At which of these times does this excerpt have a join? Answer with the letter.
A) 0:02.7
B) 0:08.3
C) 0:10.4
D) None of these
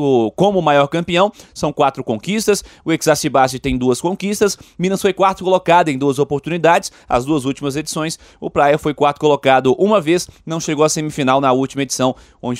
D